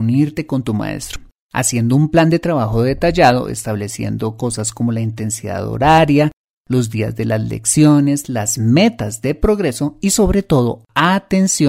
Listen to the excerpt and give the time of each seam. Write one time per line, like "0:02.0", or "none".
none